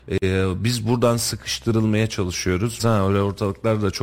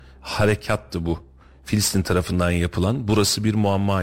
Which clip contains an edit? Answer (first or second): first